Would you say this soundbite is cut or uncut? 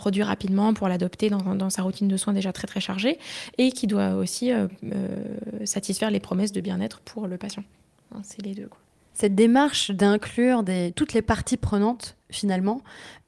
uncut